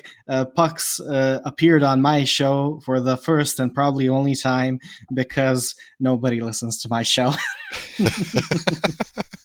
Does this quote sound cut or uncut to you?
uncut